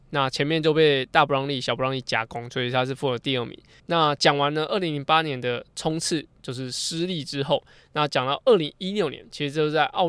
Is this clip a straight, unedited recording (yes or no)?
no